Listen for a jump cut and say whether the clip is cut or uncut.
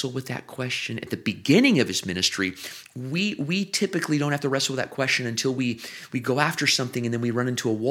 cut